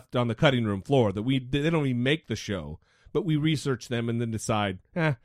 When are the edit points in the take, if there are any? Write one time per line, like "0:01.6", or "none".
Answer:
none